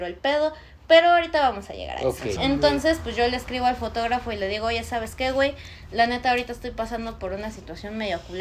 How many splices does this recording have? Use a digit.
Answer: 1